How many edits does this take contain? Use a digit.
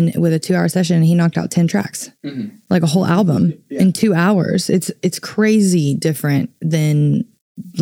0